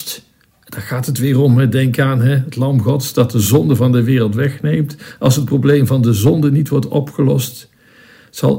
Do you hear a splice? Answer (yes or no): no